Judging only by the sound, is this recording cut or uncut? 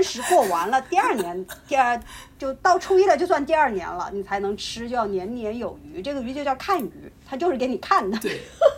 uncut